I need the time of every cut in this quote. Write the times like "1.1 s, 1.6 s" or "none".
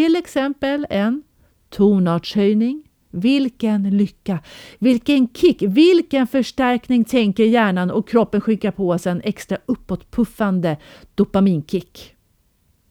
none